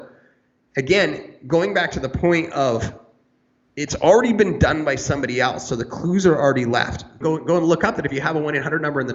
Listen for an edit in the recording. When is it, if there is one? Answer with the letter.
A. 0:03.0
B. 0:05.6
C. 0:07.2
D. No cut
C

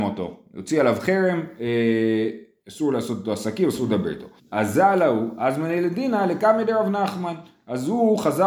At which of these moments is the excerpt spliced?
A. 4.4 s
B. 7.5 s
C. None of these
A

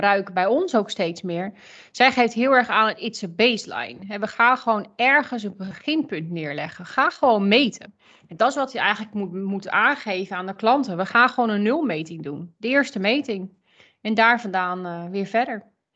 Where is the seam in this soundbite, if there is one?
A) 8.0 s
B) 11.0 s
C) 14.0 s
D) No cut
D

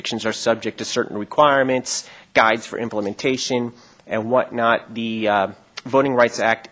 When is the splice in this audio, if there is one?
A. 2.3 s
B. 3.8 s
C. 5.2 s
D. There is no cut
D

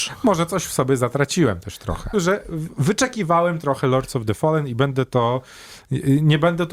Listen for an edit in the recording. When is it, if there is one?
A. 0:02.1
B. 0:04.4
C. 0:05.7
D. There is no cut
A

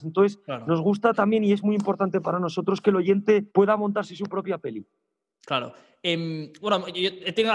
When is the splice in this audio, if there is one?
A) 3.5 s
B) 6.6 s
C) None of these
A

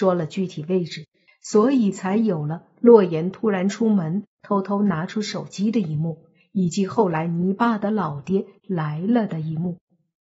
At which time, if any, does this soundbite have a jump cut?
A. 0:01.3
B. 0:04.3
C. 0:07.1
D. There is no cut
A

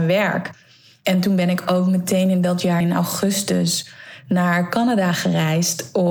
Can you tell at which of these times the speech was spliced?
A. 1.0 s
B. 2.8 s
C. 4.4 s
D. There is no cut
B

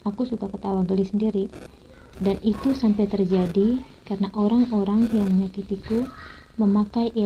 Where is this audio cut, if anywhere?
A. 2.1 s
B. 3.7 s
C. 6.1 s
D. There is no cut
A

